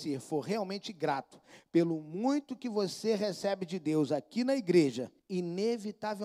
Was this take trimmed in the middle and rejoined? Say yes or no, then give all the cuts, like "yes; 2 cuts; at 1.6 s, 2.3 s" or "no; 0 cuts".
yes; 1 cut; at 5.2 s